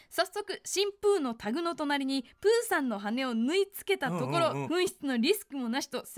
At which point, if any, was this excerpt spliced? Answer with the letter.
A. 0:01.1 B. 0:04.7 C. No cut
B